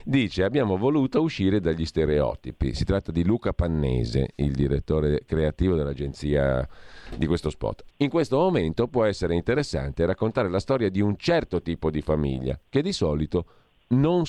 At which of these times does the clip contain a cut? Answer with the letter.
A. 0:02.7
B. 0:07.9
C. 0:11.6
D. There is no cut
B